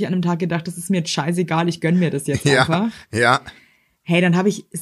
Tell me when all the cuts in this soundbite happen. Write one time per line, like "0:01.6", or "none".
none